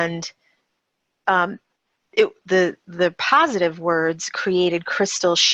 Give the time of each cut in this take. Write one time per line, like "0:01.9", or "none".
0:02.4